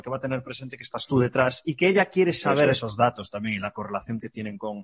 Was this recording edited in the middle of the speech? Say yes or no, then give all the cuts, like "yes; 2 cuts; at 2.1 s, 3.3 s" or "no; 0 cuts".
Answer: no; 0 cuts